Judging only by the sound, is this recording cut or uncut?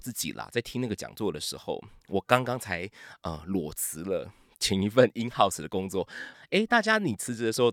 cut